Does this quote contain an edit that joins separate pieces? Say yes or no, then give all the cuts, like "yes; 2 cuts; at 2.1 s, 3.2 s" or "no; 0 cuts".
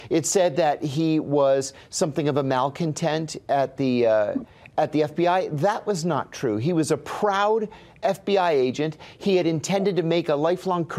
no; 0 cuts